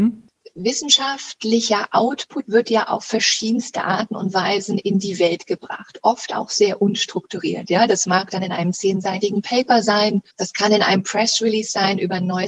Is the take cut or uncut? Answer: cut